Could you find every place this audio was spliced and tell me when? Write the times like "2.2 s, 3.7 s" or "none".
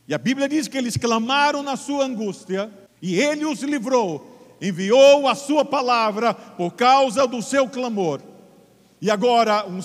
none